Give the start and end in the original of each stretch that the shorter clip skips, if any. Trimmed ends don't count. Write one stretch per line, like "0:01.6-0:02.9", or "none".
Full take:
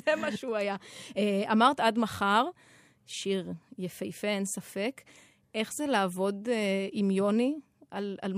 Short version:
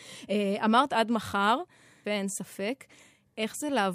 0:02.9-0:04.2